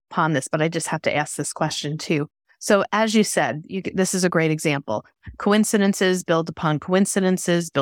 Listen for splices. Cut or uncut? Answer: uncut